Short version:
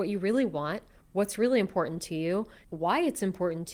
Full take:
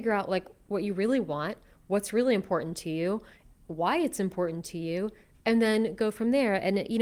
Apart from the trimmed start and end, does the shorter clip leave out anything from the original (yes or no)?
yes